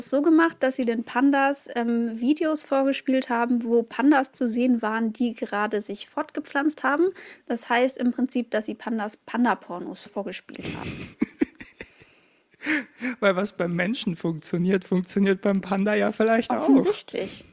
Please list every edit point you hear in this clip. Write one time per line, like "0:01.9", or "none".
none